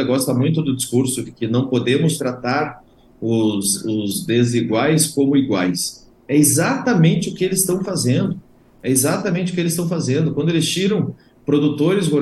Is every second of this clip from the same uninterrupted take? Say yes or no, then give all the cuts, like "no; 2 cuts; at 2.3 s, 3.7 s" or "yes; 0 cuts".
yes; 0 cuts